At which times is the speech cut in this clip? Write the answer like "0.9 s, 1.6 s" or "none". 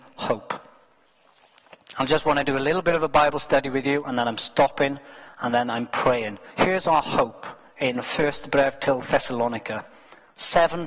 none